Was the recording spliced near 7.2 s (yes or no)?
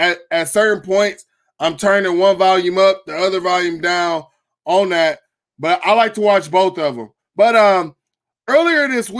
yes